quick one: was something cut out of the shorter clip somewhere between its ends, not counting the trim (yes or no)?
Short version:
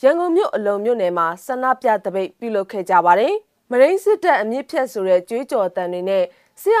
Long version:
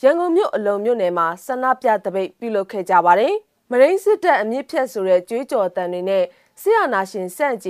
no